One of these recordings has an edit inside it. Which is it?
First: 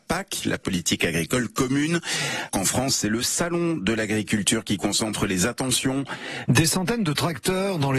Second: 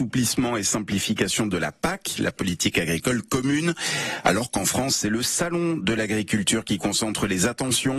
first; 2 cuts; at 2.5 s, 6.5 s

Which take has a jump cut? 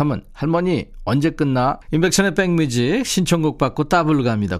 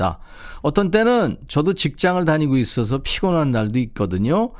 first; 1 cut; at 1.8 s

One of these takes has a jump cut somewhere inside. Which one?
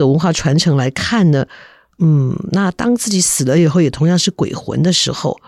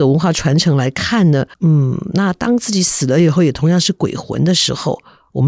second; 1 cut; at 1.5 s

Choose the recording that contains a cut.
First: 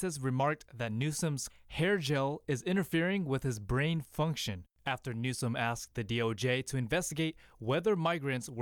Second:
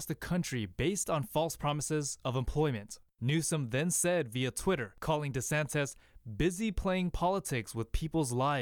first; 1 cut; at 1.5 s

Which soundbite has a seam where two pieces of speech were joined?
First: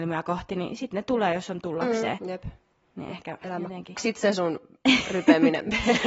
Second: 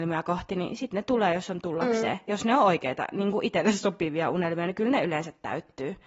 first; 2 cuts; at 2.2 s, 4.0 s

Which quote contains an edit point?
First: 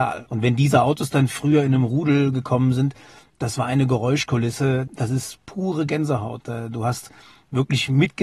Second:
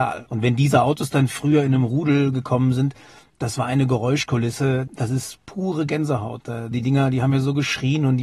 second; 1 cut; at 6.7 s

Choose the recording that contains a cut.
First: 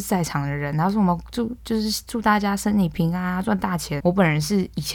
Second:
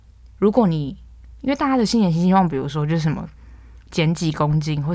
first; 1 cut; at 4.0 s

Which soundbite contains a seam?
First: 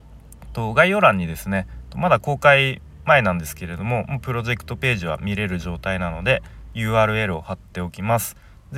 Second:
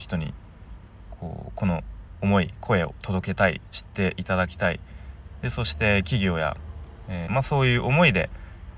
second; 1 cut; at 7.3 s

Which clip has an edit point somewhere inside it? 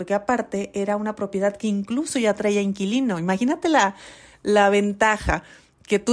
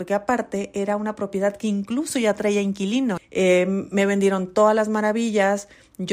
second; 1 cut; at 3.2 s

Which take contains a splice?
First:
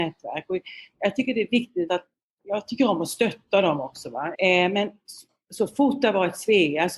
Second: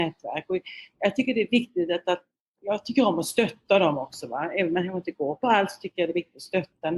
first; 2 cuts; at 1.9 s, 4.3 s

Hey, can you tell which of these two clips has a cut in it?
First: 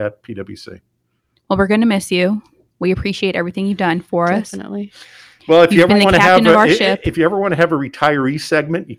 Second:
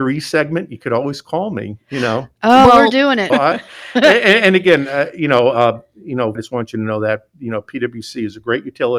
second; 2 cuts; at 3.3 s, 6.3 s

